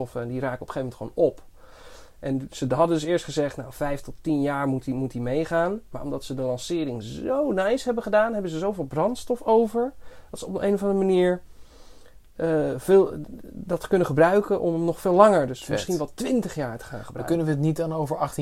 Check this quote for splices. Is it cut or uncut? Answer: uncut